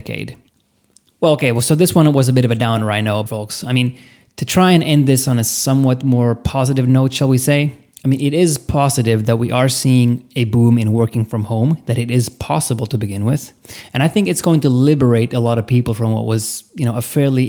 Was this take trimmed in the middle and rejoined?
yes; 1 cut; at 3.3 s

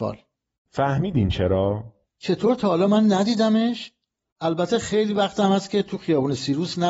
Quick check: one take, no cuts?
no; 1 cut; at 2.1 s

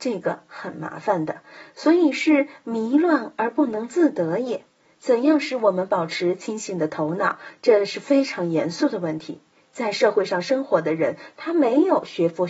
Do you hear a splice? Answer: no; 0 cuts

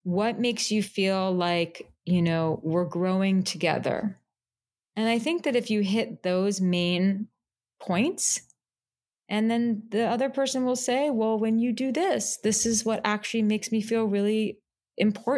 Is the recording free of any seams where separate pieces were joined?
yes; 0 cuts

